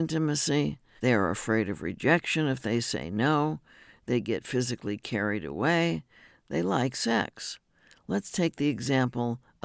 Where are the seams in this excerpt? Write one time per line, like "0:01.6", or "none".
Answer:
0:01.0